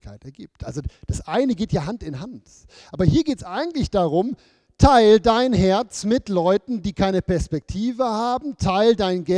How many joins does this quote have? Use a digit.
0